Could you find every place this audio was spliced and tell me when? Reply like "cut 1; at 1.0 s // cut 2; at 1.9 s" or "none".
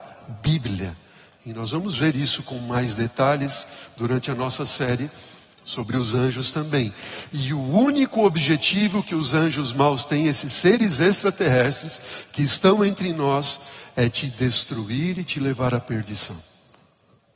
none

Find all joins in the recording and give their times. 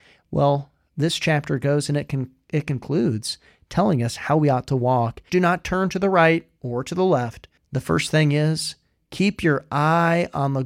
cut 1; at 5.3 s // cut 2; at 7.6 s

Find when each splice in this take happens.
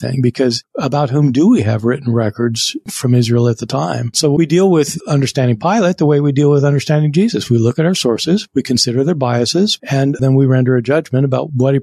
cut 1; at 4.1 s // cut 2; at 9.8 s

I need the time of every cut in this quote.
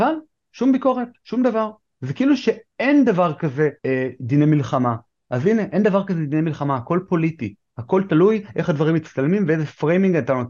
cut 1; at 3.8 s

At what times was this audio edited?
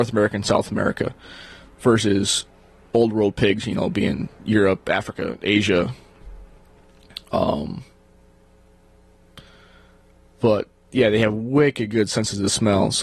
none

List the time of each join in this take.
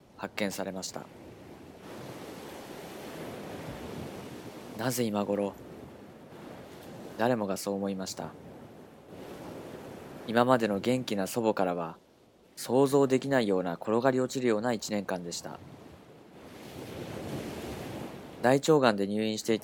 none

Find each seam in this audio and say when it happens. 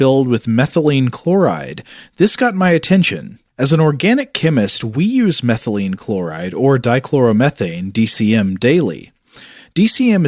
cut 1; at 3.5 s

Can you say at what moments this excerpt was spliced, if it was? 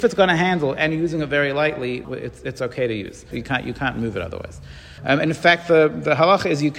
cut 1; at 2.0 s // cut 2; at 3.3 s // cut 3; at 5.0 s

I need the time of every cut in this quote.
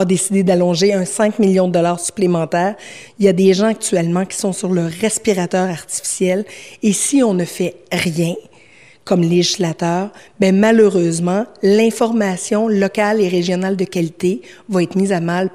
cut 1; at 3.1 s

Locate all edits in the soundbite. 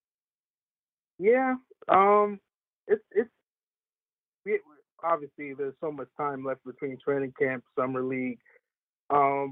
none

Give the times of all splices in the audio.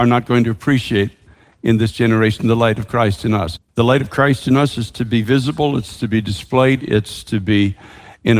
cut 1; at 3.6 s // cut 2; at 6.8 s

